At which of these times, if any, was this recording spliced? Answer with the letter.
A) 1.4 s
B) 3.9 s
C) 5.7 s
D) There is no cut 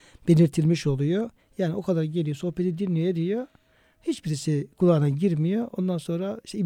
A